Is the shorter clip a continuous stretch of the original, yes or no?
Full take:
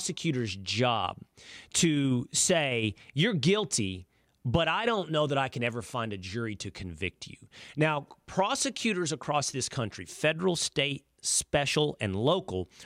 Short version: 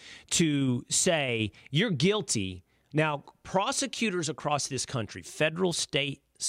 no